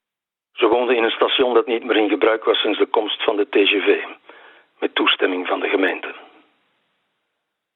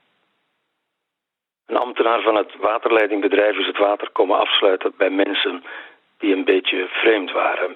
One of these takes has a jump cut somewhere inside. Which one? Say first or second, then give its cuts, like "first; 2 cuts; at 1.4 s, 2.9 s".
second; 1 cut; at 1.5 s